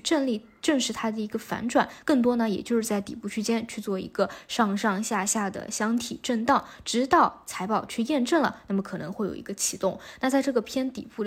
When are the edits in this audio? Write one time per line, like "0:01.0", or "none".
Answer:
none